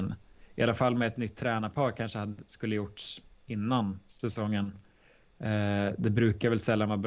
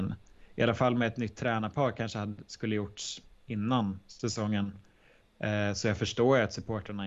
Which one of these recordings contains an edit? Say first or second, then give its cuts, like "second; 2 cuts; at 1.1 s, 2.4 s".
second; 1 cut; at 5.2 s